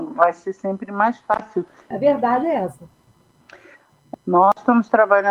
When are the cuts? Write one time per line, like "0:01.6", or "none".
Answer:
0:01.9
0:04.2